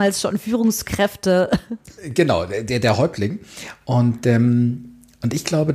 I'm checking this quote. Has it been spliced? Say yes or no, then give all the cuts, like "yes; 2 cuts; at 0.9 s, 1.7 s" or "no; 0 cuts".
no; 0 cuts